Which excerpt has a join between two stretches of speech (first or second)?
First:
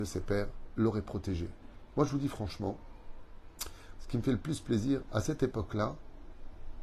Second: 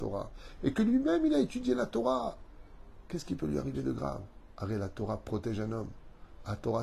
first